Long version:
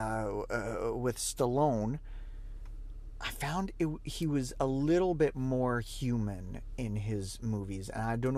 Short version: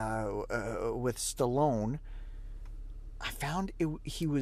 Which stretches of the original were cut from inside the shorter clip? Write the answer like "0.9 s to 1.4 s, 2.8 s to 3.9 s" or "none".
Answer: none

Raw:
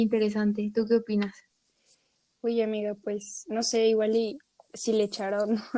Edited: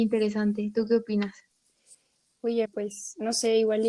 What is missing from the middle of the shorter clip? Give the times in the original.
2.7 s to 2.9 s

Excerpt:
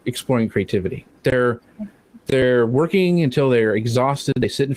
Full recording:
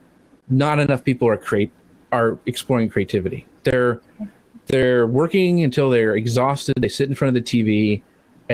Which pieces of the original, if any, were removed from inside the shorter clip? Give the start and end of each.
none

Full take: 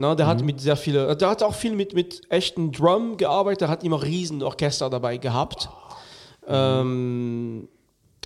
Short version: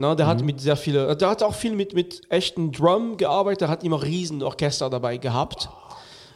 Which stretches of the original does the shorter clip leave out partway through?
none

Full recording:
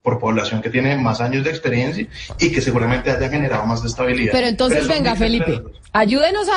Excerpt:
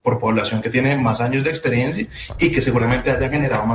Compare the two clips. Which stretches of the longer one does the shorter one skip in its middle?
none

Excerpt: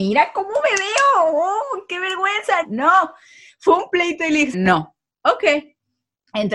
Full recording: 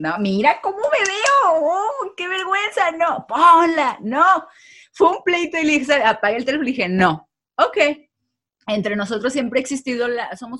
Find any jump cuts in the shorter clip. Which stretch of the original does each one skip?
2.9 s to 4.0 s, 5.9 s to 6.9 s

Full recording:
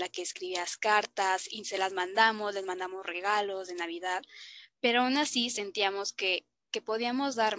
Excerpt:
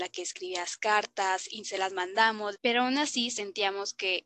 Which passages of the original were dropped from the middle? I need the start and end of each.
2.5 s to 4.7 s

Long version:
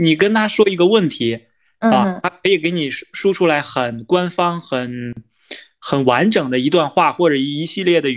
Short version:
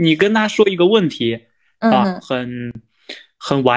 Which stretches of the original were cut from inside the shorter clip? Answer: 2.2 s to 4.6 s

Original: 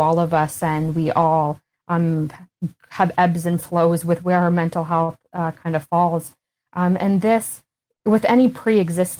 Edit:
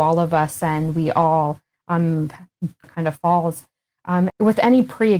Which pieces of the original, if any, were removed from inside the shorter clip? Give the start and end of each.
2.8 s to 5.5 s, 7.0 s to 8.0 s

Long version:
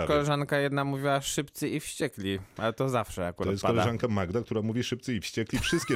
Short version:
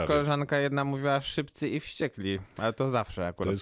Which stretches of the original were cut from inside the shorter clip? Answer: none

